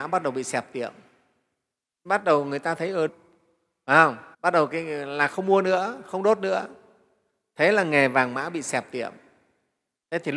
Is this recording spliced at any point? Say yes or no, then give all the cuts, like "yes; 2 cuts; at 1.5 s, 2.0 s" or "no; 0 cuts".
yes; 2 cuts; at 3.1 s, 4.3 s